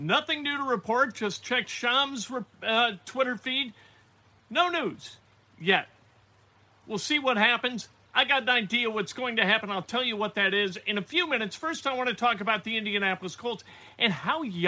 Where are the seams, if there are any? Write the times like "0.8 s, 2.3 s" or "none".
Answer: none